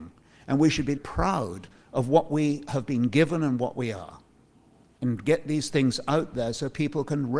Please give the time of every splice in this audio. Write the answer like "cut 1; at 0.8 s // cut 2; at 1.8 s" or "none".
cut 1; at 1.0 s